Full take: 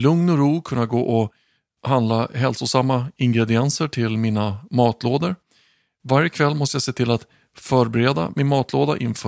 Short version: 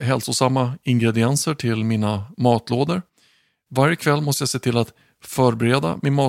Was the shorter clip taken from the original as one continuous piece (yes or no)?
yes